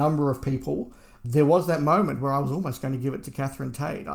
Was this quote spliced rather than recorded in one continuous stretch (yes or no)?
no